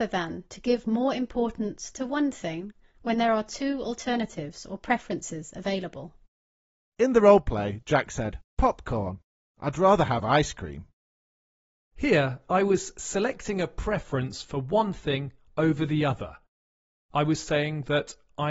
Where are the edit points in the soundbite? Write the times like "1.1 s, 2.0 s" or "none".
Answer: none